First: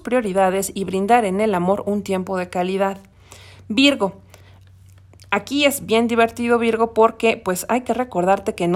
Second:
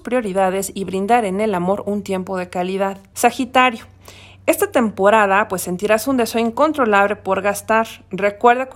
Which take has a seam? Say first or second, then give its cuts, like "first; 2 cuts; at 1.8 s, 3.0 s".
second; 1 cut; at 3.1 s